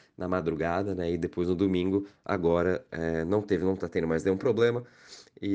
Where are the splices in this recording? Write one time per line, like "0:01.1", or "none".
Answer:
none